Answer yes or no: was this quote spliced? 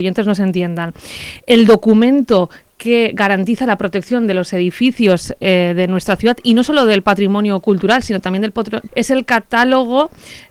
yes